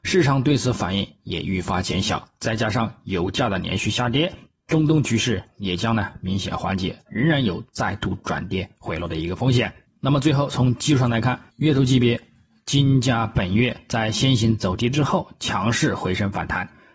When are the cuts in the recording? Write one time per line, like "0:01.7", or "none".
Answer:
0:07.1
0:09.9
0:11.5